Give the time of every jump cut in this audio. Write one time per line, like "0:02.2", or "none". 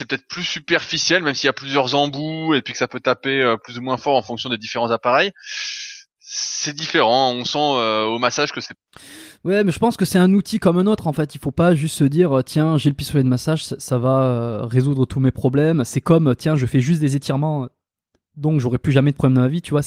none